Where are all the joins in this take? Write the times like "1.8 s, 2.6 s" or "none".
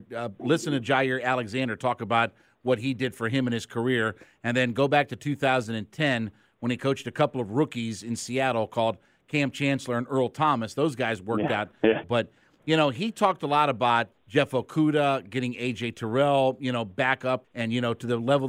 12.0 s, 14.1 s, 17.4 s